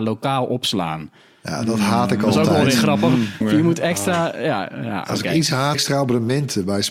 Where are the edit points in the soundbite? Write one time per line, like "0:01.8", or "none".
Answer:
0:03.4
0:05.7